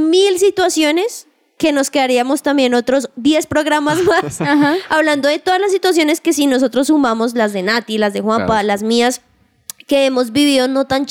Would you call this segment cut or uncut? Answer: uncut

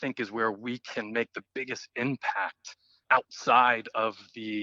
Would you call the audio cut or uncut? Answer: cut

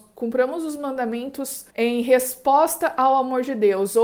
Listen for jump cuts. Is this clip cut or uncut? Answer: cut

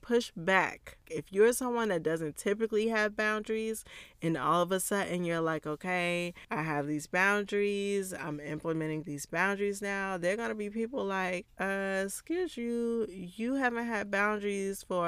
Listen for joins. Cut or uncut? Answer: cut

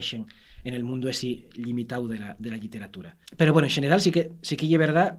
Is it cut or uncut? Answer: cut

